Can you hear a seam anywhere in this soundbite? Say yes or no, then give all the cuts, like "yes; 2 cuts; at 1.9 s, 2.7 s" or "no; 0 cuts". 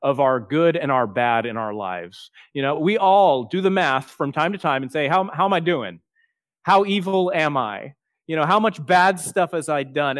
no; 0 cuts